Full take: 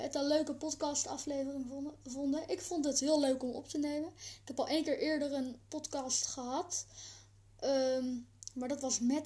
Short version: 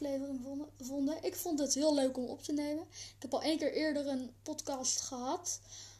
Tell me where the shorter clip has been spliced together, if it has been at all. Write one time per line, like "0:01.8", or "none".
none